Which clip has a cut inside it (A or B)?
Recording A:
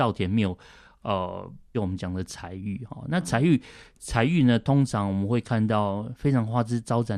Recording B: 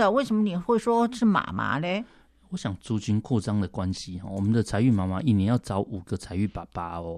A